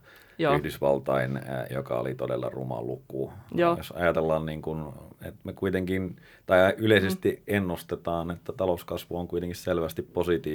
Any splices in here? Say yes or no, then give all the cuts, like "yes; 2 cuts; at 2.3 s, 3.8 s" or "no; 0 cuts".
yes; 2 cuts; at 1.7 s, 3.7 s